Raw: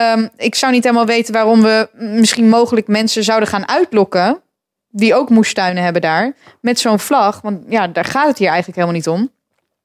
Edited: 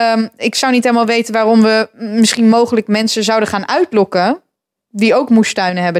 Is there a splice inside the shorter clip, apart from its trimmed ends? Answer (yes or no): no